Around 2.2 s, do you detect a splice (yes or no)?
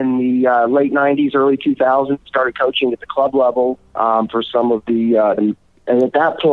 no